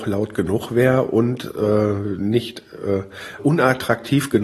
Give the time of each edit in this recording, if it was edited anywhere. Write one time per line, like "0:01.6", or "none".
0:03.4